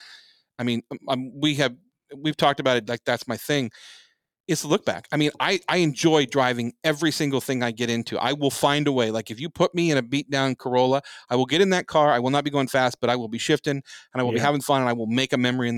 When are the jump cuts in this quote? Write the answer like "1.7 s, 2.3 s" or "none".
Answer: 2.9 s